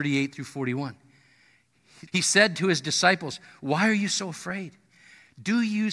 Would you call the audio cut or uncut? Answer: cut